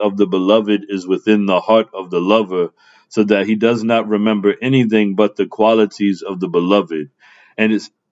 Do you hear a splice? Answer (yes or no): no